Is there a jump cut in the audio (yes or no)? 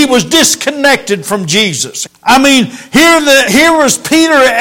yes